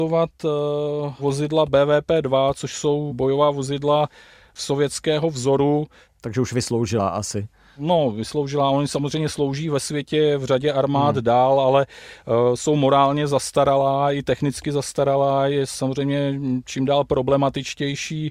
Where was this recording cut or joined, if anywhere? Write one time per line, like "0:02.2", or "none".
none